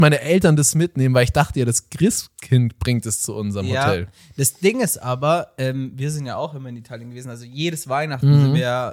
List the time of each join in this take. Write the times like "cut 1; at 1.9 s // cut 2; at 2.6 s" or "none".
none

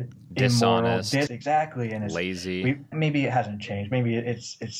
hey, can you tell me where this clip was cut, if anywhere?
cut 1; at 1.3 s // cut 2; at 2.9 s

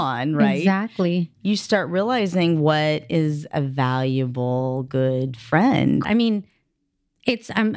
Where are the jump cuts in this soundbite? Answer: cut 1; at 1.3 s // cut 2; at 6.0 s

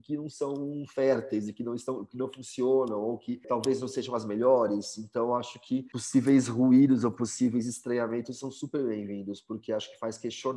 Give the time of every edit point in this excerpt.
none

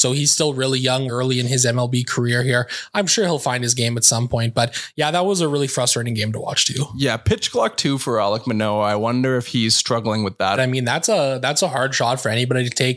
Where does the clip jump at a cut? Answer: cut 1; at 1.1 s // cut 2; at 10.6 s

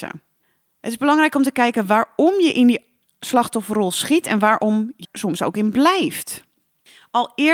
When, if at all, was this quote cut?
cut 1; at 5.0 s

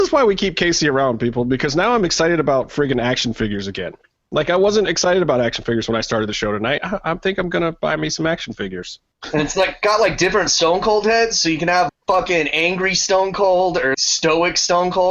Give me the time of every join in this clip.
cut 1; at 6.8 s // cut 2; at 11.9 s // cut 3; at 13.9 s

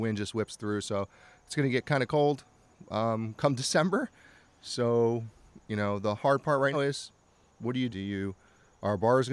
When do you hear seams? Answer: cut 1; at 6.7 s // cut 2; at 7.9 s

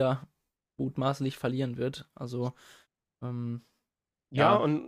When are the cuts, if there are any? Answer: none

